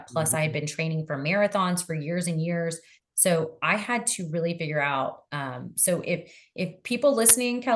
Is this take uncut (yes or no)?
yes